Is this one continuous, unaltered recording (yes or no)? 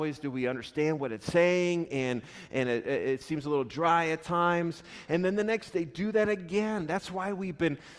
no